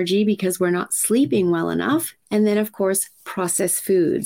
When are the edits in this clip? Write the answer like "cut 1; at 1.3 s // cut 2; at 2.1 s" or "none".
cut 1; at 2.2 s